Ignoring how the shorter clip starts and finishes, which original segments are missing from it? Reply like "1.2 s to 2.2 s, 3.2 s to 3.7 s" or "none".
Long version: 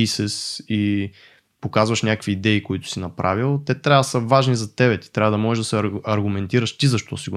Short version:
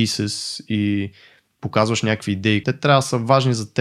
2.6 s to 3.6 s